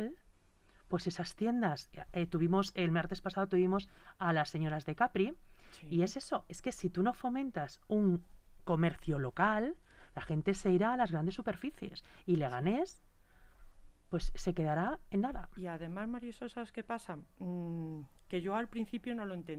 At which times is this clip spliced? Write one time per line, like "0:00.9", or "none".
none